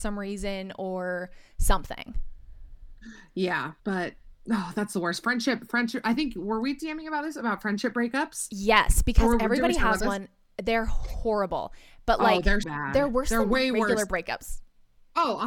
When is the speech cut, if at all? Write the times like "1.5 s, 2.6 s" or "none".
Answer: 3.8 s, 12.6 s